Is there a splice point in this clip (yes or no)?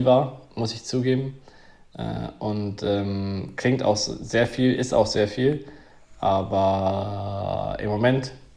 no